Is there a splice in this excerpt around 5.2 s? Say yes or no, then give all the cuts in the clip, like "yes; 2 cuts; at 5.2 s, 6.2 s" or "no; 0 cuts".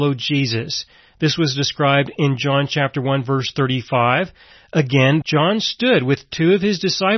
yes; 1 cut; at 5.2 s